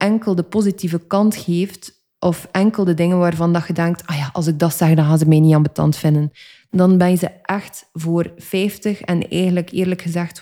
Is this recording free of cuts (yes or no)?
yes